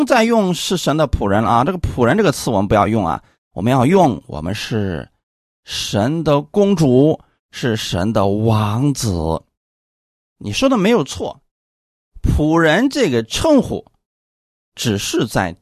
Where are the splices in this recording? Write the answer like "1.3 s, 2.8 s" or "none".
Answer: none